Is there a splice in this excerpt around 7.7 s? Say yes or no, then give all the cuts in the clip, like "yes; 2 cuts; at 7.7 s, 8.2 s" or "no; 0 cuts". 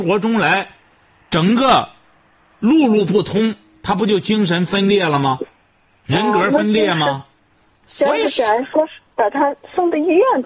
no; 0 cuts